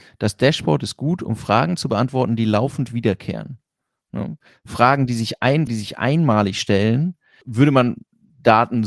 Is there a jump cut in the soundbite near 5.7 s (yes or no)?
yes